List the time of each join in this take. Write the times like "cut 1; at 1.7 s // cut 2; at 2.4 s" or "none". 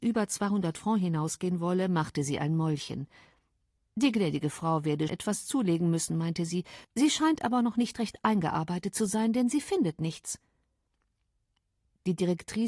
cut 1; at 5.1 s // cut 2; at 6.8 s